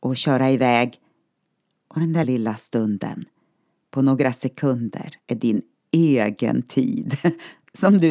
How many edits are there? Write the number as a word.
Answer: two